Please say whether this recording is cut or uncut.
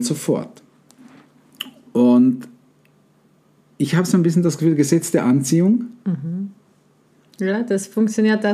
uncut